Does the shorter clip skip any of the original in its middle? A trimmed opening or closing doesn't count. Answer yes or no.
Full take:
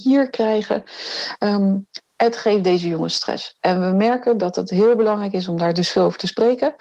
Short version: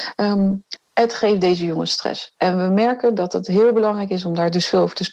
no